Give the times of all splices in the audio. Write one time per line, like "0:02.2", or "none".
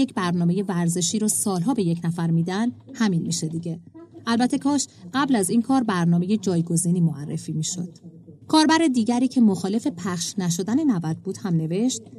0:08.4